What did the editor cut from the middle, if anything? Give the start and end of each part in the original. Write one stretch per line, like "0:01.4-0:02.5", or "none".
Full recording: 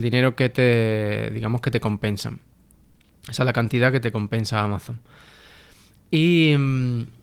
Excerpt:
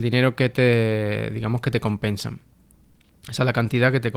none